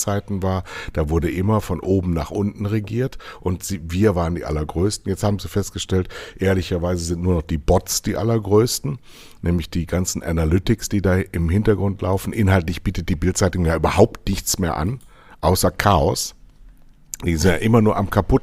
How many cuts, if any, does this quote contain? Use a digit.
0